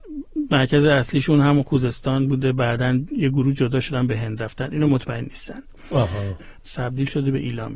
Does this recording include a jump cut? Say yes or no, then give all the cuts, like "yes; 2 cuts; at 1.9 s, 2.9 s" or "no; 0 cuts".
yes; 1 cut; at 6.6 s